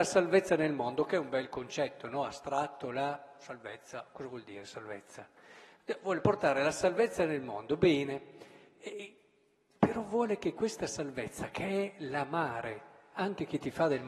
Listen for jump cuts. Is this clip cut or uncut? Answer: uncut